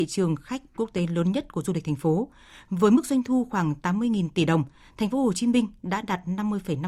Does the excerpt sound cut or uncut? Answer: uncut